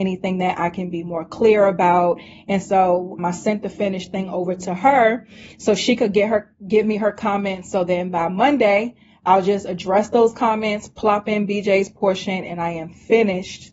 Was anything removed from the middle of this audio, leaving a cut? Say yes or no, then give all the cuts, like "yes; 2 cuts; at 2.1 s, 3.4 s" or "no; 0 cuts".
yes; 1 cut; at 3.2 s